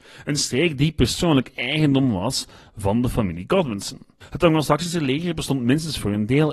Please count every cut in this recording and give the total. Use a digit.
1